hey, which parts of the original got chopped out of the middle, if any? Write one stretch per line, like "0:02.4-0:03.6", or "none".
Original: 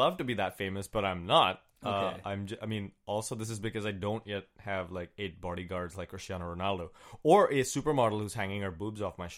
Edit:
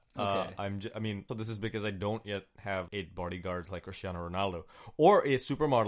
0:03.0-0:03.3
0:04.9-0:05.1